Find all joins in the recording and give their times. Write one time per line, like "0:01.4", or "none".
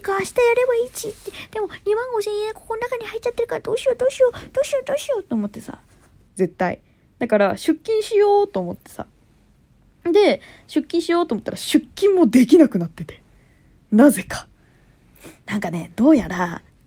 0:06.3